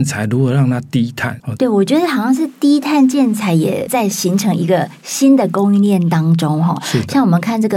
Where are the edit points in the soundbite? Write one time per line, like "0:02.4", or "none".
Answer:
0:01.6